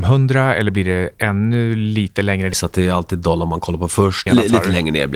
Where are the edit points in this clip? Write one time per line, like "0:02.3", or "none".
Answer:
0:02.5
0:04.3